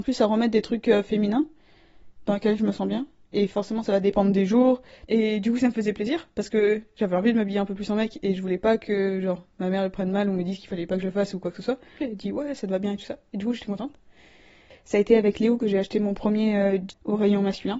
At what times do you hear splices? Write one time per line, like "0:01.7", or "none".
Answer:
0:05.1
0:12.0
0:16.9